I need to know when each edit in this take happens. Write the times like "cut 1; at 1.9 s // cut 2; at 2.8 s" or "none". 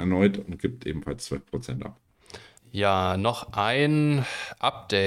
cut 1; at 2.6 s